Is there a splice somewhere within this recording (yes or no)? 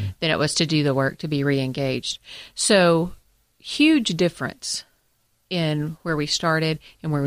no